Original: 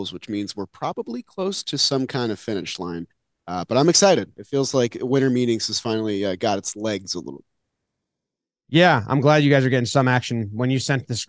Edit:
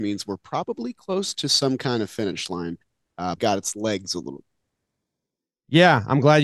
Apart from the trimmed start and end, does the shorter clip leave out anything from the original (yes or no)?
yes